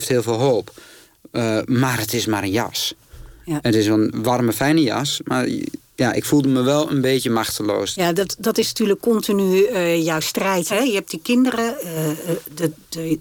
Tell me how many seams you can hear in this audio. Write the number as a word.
three